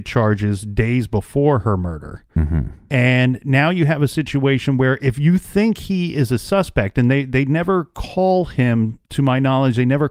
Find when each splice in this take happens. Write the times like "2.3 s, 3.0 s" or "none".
none